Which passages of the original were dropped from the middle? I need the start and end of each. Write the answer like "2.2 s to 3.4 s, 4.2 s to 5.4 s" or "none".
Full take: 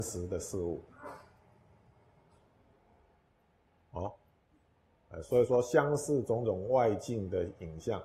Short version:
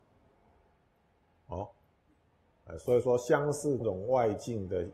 6.2 s to 6.4 s